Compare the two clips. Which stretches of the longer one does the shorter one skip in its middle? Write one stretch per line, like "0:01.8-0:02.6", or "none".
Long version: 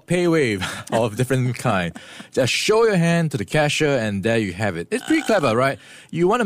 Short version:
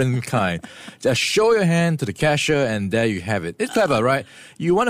0:05.0-0:05.2